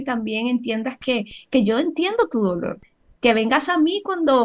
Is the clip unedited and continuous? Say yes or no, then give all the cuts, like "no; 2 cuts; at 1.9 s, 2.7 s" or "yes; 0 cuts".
yes; 0 cuts